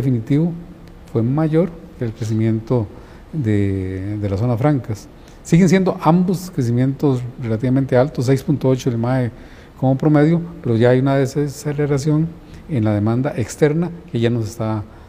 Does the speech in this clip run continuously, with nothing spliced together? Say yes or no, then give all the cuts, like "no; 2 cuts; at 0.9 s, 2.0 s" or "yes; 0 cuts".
yes; 0 cuts